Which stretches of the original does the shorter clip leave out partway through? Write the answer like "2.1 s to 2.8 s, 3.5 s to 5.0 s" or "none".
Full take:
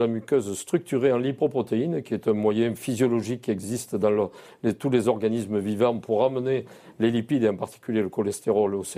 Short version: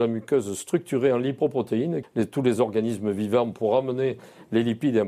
2.0 s to 4.5 s